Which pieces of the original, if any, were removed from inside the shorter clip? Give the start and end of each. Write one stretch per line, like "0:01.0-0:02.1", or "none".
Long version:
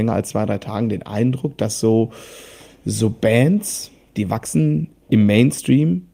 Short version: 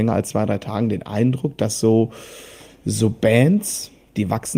none